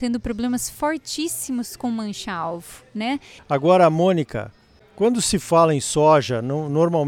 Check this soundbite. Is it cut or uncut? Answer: cut